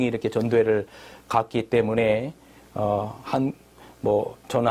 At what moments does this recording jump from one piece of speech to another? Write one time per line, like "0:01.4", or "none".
none